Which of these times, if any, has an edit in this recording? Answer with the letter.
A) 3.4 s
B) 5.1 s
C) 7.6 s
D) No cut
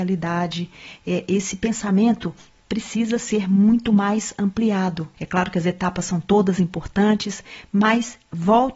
B